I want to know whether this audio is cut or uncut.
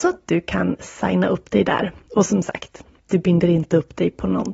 uncut